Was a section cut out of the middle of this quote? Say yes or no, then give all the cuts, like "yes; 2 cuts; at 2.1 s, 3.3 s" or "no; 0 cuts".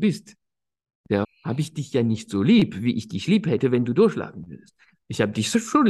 yes; 1 cut; at 1.2 s